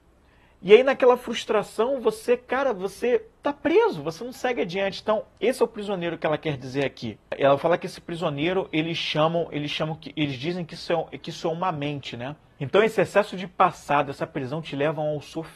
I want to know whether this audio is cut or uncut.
cut